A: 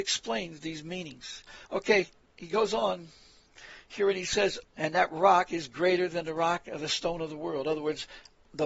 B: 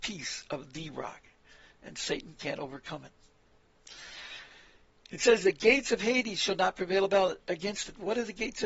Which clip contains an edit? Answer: A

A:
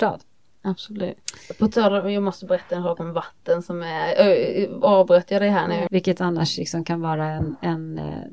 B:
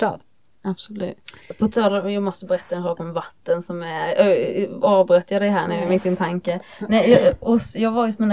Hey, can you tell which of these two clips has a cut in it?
A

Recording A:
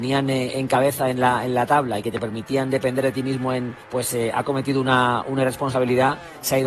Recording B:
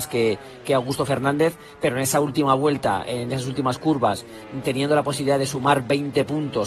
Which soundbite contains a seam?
A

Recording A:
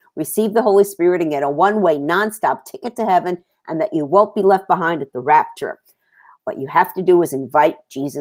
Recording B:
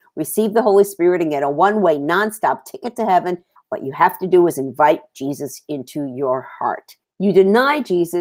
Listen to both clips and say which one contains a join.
B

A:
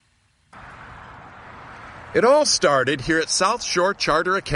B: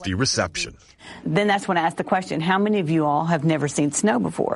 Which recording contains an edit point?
B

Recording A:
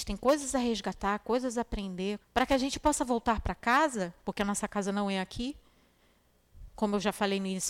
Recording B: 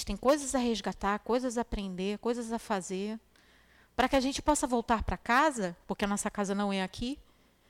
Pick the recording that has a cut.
A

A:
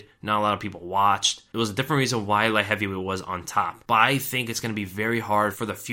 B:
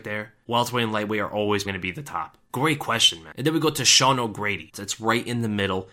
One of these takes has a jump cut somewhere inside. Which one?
B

